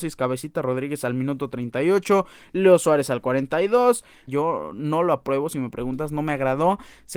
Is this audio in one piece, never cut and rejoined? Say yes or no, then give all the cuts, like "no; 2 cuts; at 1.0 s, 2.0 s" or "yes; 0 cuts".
no; 1 cut; at 4.3 s